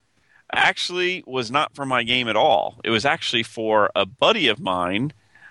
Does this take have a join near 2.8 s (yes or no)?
no